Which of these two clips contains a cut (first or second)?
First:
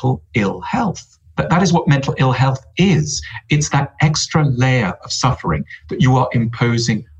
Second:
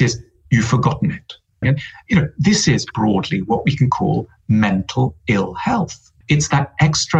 second